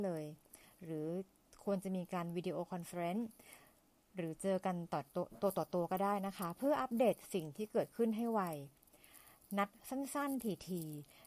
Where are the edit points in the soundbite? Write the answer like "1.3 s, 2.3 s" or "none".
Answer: none